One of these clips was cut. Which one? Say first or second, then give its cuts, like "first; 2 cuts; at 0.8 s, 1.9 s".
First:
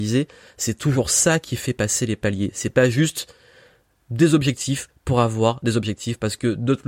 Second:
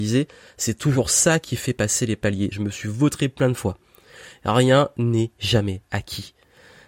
second; 1 cut; at 2.5 s